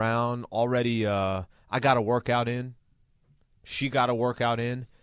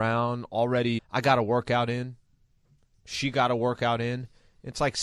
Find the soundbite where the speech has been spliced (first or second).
second